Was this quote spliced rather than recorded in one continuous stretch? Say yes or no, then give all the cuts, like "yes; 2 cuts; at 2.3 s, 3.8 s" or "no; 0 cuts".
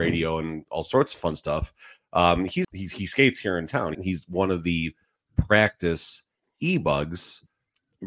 yes; 2 cuts; at 2.6 s, 3.9 s